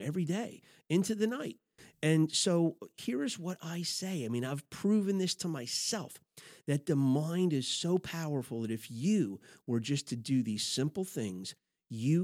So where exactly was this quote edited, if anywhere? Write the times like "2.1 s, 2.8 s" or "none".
none